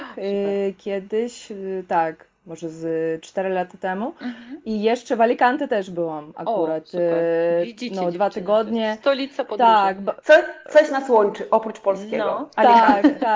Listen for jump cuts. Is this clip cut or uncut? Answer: uncut